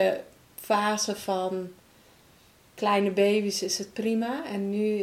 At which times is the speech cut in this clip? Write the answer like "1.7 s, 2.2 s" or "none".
none